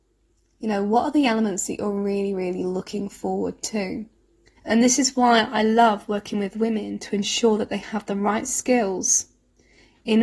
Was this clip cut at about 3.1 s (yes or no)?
no